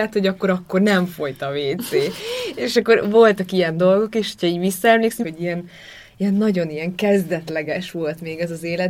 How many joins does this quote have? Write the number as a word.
two